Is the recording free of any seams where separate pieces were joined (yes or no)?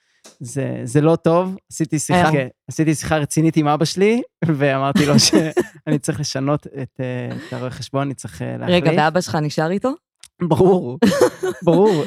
no